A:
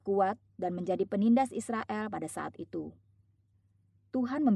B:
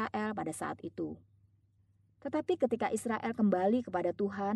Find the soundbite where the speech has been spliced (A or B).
B